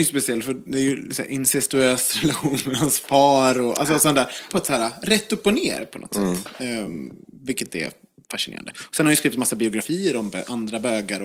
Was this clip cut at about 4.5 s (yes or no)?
yes